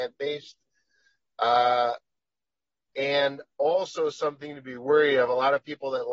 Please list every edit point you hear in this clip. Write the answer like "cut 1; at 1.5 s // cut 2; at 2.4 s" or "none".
none

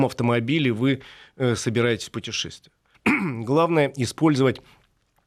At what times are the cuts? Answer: cut 1; at 2.9 s

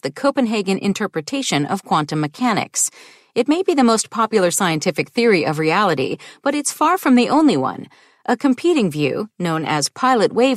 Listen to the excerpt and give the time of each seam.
none

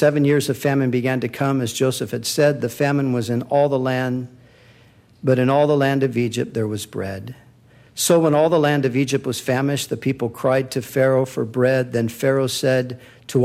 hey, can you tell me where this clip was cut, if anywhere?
none

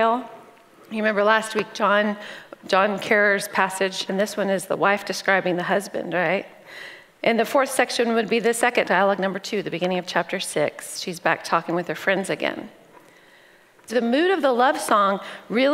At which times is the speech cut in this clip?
cut 1; at 4.1 s // cut 2; at 8.8 s // cut 3; at 13.9 s

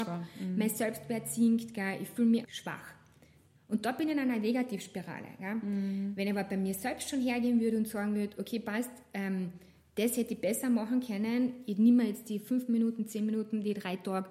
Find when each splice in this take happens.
cut 1; at 2.4 s

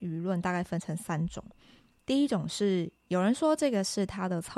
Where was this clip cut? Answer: none

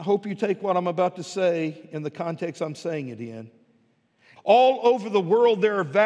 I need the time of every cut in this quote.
cut 1; at 4.4 s

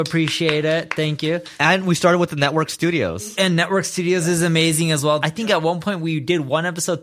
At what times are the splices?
cut 1; at 5.2 s

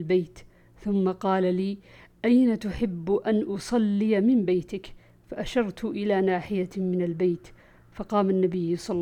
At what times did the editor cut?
none

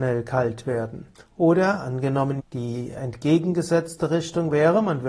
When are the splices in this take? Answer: cut 1; at 1.1 s // cut 2; at 2.4 s

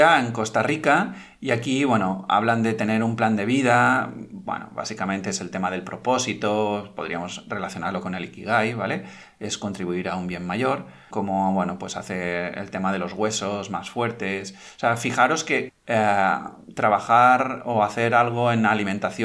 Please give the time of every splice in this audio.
cut 1; at 11.1 s // cut 2; at 15.7 s

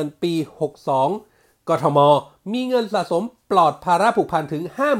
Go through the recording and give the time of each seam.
none

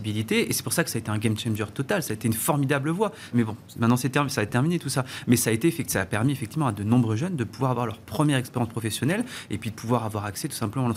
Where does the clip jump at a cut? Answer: cut 1; at 3.3 s

